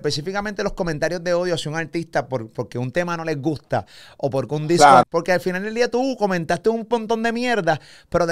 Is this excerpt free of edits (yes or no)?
no